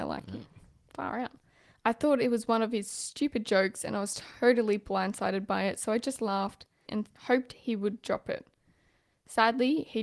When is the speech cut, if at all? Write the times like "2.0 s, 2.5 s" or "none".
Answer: 6.9 s

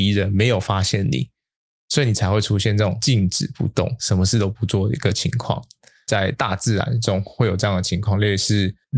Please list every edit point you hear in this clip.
none

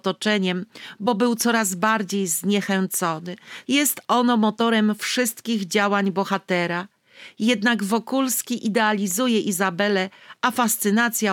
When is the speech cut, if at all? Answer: 3.6 s

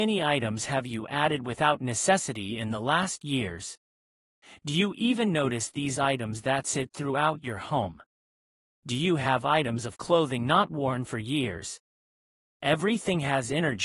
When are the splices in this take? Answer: none

